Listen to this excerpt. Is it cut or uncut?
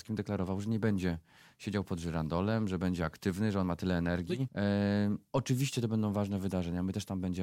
cut